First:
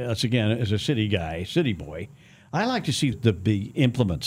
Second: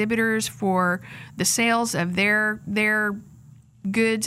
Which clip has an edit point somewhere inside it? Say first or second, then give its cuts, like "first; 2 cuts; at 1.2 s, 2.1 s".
first; 1 cut; at 3.1 s